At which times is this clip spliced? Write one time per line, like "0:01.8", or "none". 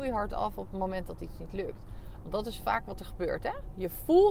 0:02.2